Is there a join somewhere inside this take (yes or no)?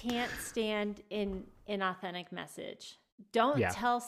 no